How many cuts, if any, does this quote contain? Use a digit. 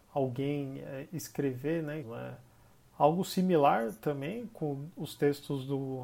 1